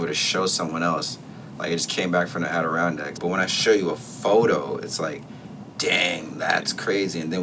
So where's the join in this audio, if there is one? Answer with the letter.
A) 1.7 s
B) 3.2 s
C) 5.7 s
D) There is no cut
B